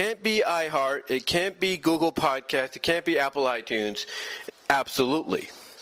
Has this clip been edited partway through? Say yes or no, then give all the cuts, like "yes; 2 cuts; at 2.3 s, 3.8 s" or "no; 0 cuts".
yes; 1 cut; at 4.5 s